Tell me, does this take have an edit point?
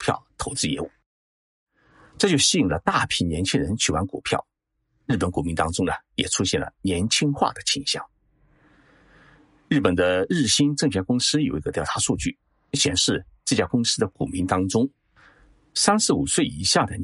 no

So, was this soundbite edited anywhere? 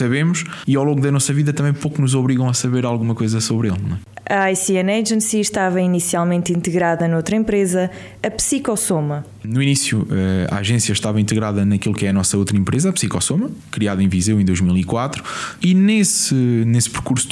no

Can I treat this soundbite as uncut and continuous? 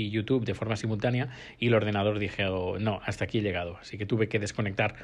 yes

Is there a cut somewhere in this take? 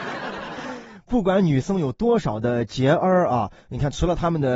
no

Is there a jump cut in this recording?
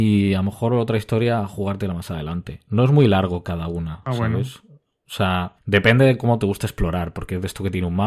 no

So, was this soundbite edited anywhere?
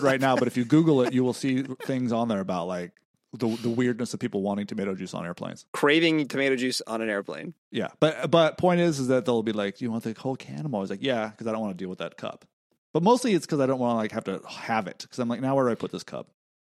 no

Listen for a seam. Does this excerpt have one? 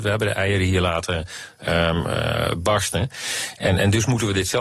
no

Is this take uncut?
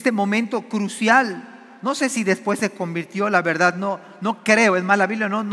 yes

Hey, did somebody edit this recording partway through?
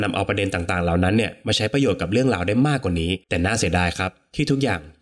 yes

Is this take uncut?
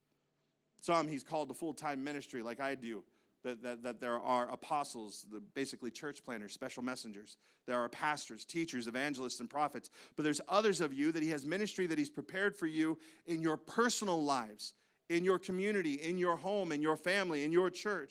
yes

